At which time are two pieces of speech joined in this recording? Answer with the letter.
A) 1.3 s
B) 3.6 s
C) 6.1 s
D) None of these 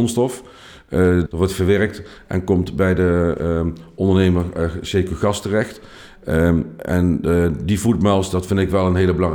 A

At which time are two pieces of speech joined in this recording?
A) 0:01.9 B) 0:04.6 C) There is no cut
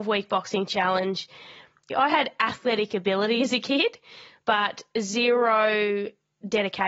A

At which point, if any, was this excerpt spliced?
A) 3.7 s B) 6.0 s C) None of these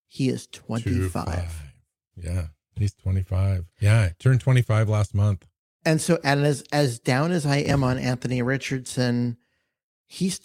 A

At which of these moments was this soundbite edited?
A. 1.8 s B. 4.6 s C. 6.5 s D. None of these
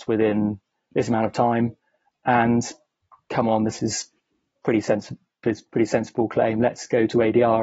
D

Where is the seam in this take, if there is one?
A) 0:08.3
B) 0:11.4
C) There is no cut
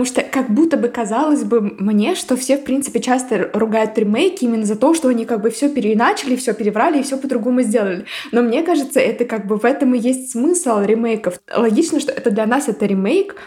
C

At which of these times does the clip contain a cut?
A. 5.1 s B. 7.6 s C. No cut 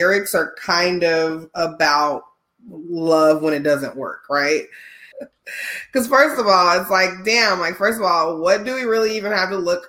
A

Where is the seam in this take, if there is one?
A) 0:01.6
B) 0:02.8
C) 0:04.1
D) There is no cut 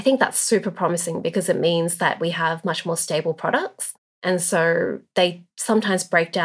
C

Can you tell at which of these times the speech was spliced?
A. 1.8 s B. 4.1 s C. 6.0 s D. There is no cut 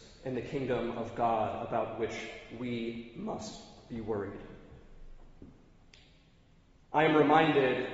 D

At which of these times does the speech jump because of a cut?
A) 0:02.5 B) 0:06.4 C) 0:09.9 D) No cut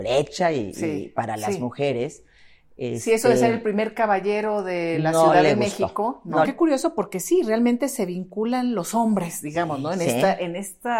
B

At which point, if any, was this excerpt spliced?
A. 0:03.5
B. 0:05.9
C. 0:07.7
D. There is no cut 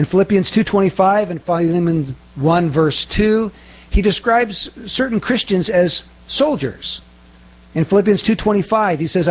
D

